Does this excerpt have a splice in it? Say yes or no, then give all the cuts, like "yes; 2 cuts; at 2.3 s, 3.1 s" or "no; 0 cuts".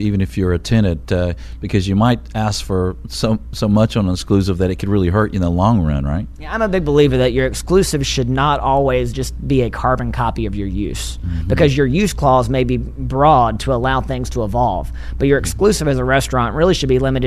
no; 0 cuts